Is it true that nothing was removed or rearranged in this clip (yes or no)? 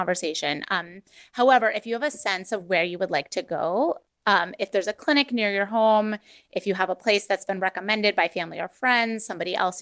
yes